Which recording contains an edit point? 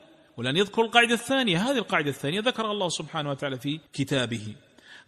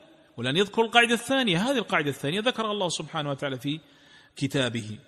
first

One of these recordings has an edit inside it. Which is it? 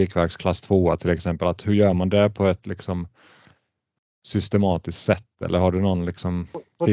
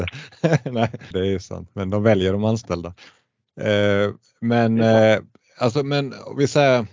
second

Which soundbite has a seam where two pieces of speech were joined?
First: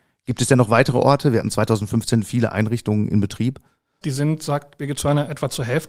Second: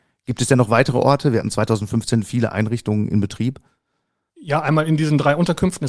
first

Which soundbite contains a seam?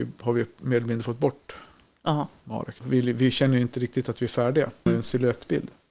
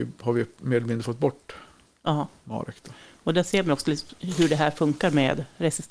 first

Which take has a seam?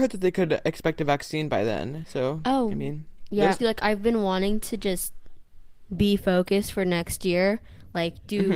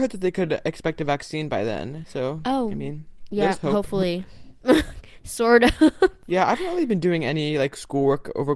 first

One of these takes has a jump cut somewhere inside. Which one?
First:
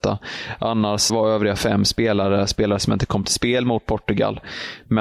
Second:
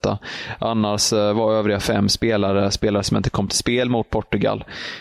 first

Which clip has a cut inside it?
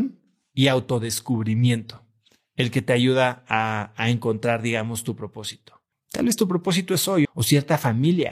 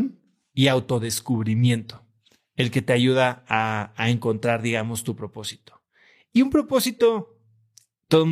first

